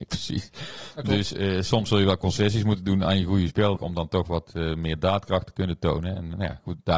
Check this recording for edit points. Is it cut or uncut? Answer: cut